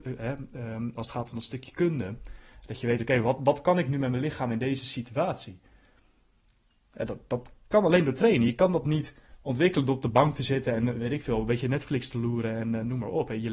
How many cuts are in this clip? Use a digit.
0